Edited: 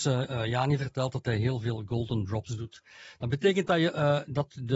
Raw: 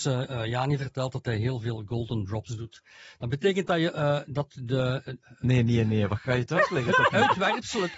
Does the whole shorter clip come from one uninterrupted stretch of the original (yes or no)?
yes